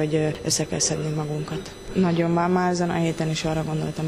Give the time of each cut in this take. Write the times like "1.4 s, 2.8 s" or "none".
1.9 s